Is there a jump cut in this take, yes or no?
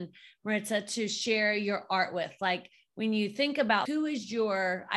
yes